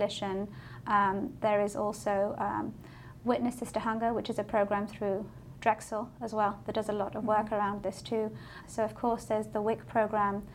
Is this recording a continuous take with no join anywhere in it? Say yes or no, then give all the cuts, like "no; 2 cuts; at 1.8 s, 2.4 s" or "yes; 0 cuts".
no; 1 cut; at 8.6 s